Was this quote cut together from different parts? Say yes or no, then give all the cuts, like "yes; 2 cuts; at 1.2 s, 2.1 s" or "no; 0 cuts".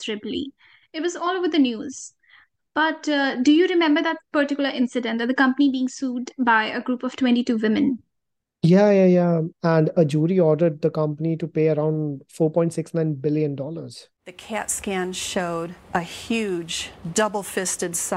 yes; 2 cuts; at 9.5 s, 15.8 s